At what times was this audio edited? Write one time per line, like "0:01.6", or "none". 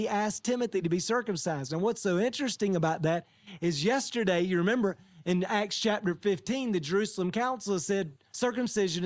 none